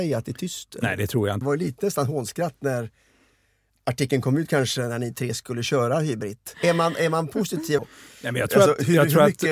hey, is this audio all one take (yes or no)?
no